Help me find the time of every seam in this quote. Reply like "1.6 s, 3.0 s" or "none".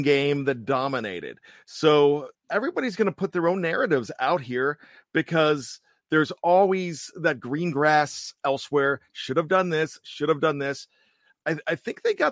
2.3 s